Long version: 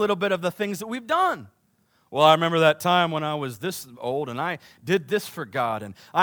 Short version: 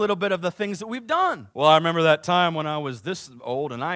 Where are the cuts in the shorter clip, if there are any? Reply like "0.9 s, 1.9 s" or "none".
1.5 s

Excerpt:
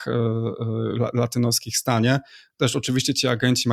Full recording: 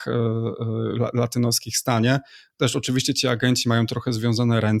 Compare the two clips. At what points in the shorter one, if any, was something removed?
none

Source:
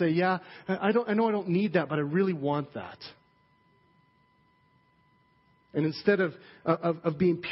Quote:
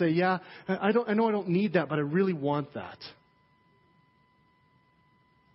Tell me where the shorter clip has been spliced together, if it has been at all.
none

